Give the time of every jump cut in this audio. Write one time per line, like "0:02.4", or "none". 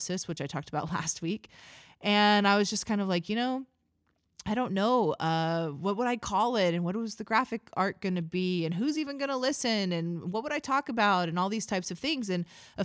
none